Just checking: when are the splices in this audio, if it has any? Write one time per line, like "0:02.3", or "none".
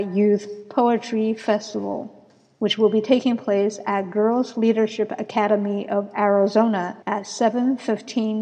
0:07.0